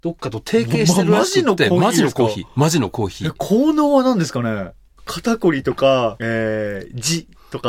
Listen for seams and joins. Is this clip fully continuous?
no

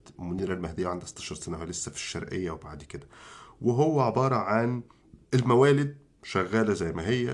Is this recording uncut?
no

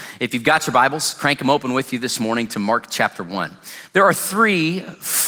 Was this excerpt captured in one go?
no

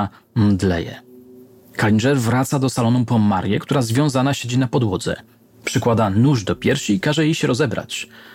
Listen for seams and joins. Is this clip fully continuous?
no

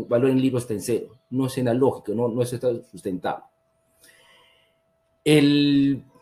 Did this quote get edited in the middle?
no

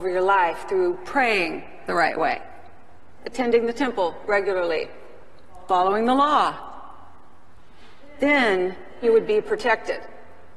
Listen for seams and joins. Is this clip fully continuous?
no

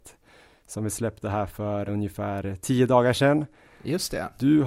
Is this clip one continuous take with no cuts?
no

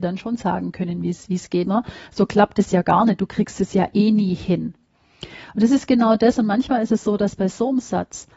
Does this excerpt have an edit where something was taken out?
yes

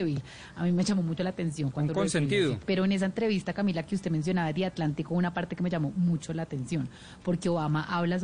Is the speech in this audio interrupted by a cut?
yes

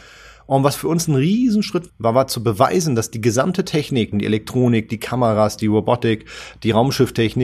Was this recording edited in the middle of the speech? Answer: yes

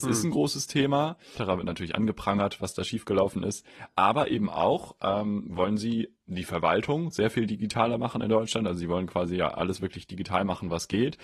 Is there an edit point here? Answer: yes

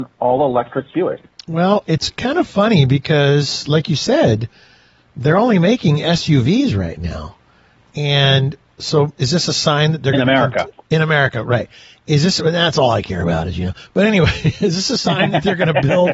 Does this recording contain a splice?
no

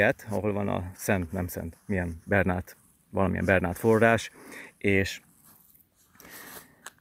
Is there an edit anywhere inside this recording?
yes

